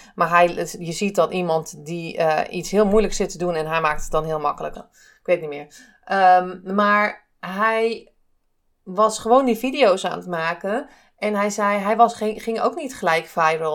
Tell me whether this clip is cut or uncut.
cut